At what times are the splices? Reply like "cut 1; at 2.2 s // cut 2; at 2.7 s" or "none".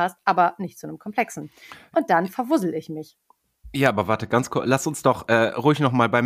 none